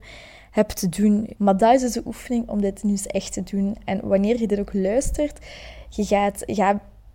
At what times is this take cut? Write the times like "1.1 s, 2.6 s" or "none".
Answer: 1.4 s